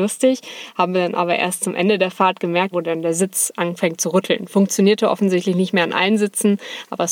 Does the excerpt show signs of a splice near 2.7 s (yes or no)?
yes